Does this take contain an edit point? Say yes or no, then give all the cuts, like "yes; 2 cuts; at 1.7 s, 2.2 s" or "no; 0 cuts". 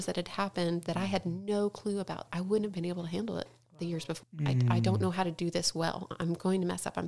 yes; 2 cuts; at 2.3 s, 4.2 s